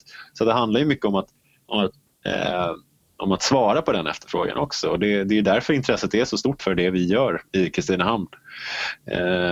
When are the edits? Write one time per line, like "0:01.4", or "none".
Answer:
0:06.6